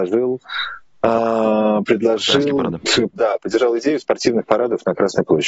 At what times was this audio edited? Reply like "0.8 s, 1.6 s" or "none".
3.1 s